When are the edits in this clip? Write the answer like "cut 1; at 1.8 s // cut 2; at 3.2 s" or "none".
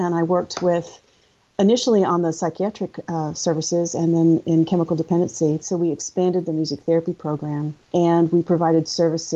cut 1; at 5.6 s // cut 2; at 7.8 s